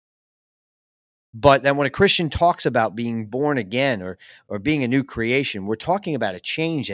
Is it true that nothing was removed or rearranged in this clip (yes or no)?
yes